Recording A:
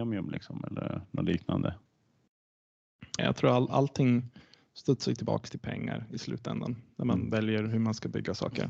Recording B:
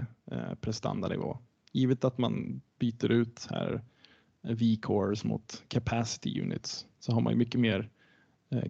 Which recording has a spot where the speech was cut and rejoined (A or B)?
A